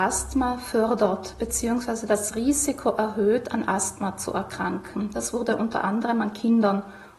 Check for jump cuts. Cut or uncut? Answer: uncut